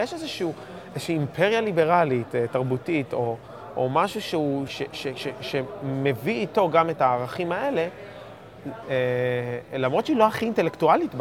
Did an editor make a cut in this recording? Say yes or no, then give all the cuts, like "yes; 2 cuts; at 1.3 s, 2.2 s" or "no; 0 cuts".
yes; 2 cuts; at 4.7 s, 8.8 s